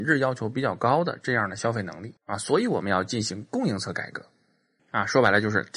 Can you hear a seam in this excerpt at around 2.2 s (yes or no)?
yes